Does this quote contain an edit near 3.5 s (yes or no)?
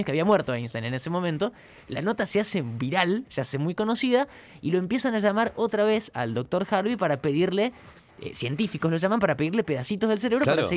no